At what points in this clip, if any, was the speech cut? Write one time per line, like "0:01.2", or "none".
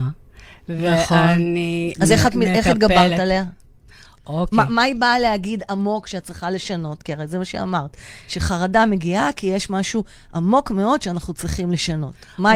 0:01.9